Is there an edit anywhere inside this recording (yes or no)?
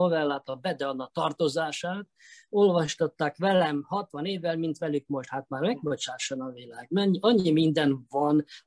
no